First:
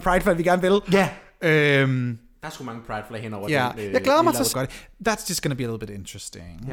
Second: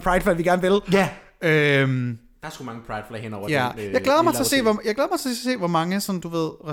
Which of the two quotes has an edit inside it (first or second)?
first